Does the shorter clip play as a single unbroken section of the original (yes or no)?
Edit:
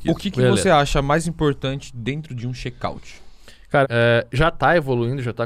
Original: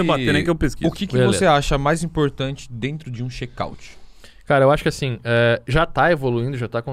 no